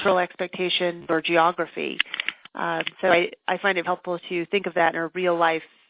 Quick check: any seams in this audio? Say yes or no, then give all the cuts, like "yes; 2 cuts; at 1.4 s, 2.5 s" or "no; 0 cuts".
yes; 1 cut; at 3.8 s